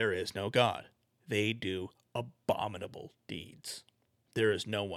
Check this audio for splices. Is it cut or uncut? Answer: cut